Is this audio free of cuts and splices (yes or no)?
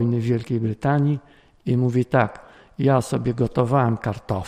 yes